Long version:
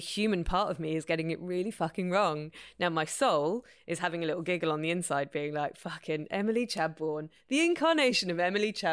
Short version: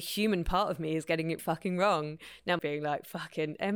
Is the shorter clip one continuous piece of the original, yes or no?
no